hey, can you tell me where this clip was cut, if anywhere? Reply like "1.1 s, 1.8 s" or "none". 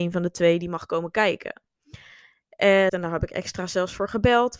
2.9 s